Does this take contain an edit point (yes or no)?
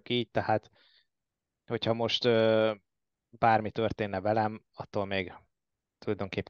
no